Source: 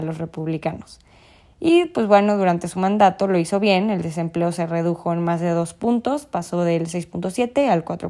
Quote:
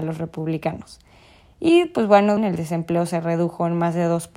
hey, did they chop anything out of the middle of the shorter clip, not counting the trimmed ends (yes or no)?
yes